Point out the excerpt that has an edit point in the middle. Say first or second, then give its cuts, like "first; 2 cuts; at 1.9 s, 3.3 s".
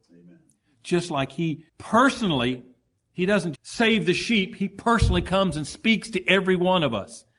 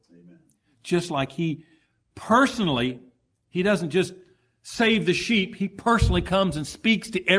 first; 2 cuts; at 1.7 s, 3.5 s